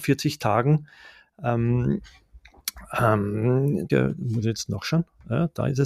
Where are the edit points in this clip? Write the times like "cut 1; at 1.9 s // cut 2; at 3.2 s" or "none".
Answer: cut 1; at 3.9 s

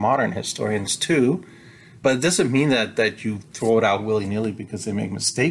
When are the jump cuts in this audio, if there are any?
none

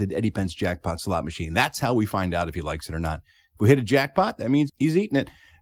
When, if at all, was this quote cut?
cut 1; at 4.7 s

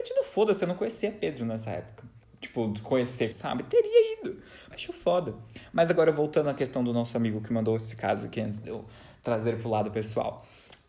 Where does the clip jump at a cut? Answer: cut 1; at 3.3 s // cut 2; at 4.7 s

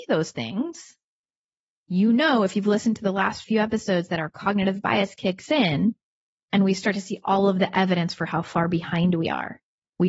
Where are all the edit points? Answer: none

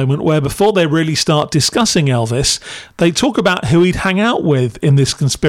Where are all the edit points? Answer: none

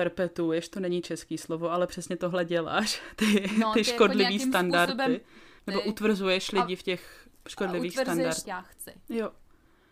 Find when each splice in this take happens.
cut 1; at 5.6 s // cut 2; at 8.4 s

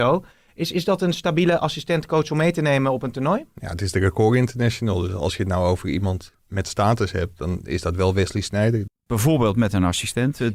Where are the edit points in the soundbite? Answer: cut 1; at 6.4 s // cut 2; at 8.9 s

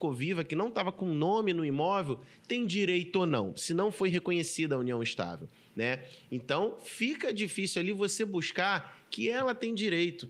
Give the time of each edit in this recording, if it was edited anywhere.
none

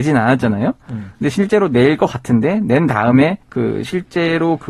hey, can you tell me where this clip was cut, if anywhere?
cut 1; at 3.4 s

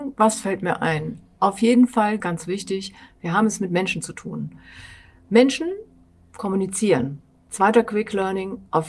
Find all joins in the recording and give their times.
cut 1; at 2.2 s

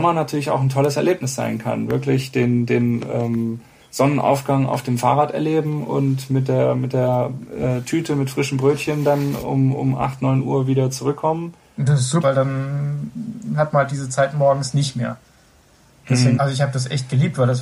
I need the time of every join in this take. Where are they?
cut 1; at 12.2 s // cut 2; at 16.4 s

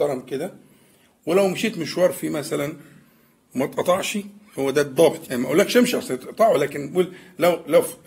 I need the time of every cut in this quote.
cut 1; at 5.2 s

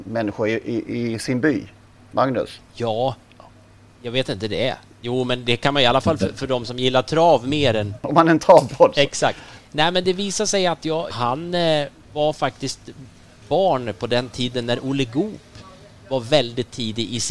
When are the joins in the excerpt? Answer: cut 1; at 11.1 s

